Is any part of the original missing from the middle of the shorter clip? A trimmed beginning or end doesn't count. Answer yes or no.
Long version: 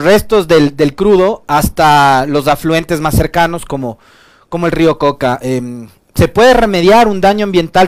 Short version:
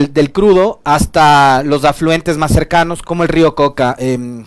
yes